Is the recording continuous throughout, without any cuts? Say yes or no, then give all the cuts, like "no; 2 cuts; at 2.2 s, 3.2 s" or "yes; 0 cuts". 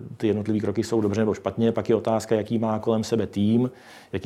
yes; 0 cuts